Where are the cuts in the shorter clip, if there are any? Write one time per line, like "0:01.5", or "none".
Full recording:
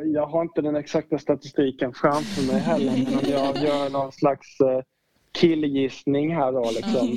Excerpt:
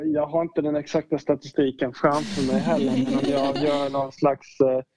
none